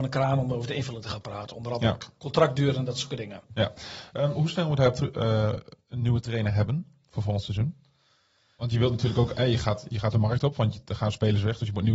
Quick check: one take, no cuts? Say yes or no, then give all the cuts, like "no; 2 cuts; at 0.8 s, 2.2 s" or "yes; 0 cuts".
yes; 0 cuts